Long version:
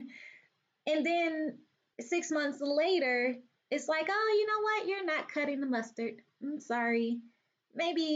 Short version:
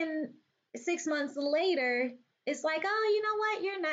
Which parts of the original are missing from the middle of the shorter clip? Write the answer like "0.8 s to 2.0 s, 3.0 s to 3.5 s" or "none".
none